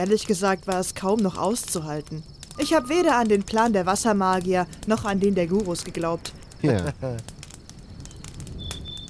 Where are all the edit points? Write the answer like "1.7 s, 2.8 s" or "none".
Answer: 2.6 s, 6.6 s